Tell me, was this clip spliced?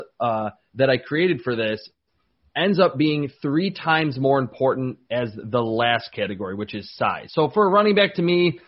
no; 0 cuts

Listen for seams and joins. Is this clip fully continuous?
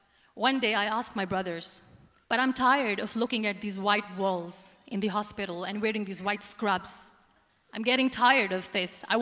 no; 1 cut; at 2.2 s

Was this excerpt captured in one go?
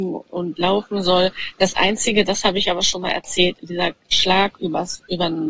no; 1 cut; at 3.6 s

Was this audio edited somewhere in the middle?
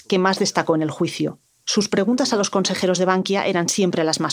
yes; 1 cut; at 1.6 s

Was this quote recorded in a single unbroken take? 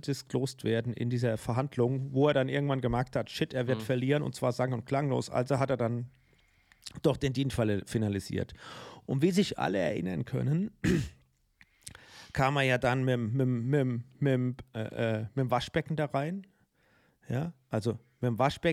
yes; 0 cuts

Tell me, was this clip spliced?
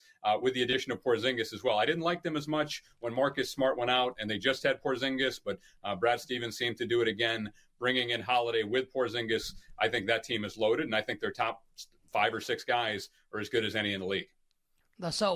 no; 0 cuts

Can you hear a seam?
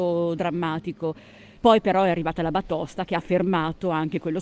yes; 1 cut; at 1.6 s

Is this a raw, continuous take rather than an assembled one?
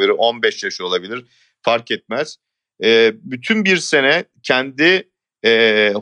yes; 0 cuts

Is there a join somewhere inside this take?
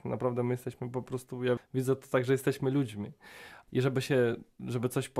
yes; 2 cuts; at 1.6 s, 3.7 s

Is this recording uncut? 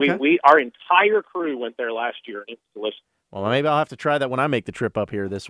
yes; 0 cuts

